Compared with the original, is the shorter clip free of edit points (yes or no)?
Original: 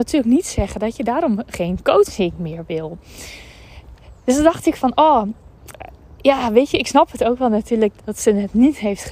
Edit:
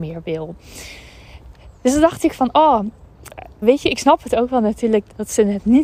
no